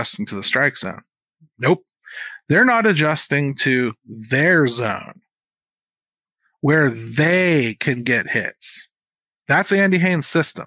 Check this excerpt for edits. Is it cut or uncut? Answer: uncut